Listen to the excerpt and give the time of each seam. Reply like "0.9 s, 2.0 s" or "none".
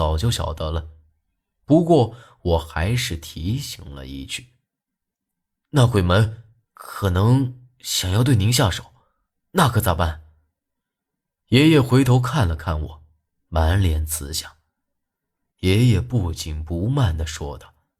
15.5 s